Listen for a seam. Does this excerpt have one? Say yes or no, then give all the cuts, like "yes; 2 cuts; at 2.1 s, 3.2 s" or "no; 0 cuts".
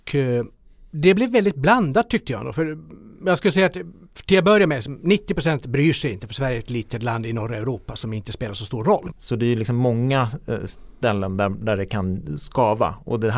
yes; 1 cut; at 9.1 s